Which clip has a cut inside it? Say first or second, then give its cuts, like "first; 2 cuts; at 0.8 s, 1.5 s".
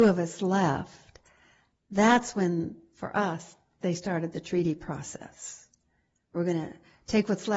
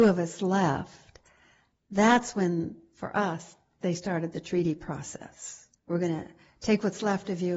second; 1 cut; at 5.8 s